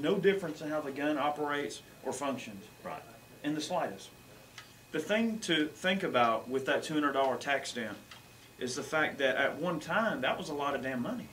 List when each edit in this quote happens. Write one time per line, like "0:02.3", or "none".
none